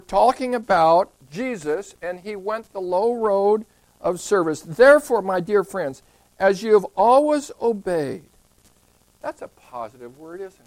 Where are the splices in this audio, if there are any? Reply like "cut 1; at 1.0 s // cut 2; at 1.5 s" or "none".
none